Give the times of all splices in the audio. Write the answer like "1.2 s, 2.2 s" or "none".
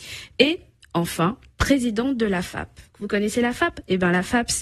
2.9 s